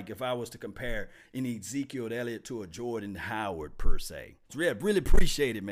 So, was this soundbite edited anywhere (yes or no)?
yes